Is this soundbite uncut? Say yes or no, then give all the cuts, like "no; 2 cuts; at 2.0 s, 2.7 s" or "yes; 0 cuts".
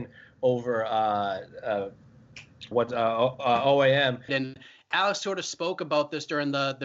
no; 2 cuts; at 2.7 s, 4.3 s